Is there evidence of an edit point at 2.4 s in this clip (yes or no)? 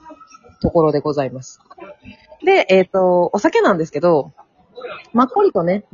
yes